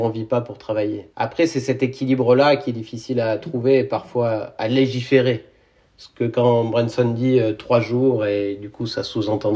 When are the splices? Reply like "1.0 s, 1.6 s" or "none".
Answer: 1.1 s